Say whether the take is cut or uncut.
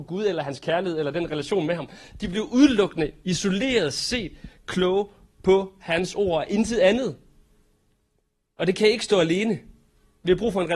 uncut